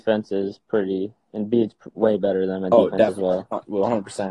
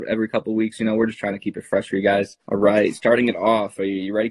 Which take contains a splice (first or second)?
second